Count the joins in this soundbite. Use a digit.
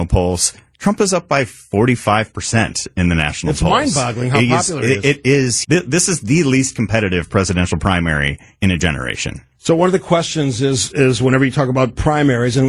1